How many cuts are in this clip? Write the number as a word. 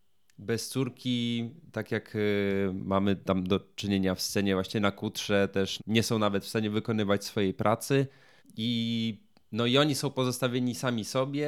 two